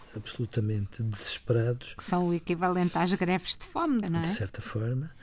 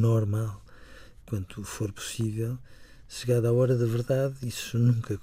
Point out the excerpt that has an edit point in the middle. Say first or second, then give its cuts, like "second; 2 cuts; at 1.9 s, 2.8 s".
first; 1 cut; at 4.0 s